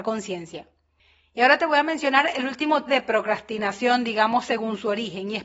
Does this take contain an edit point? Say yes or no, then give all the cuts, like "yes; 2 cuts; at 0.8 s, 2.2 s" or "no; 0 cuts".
yes; 1 cut; at 2.9 s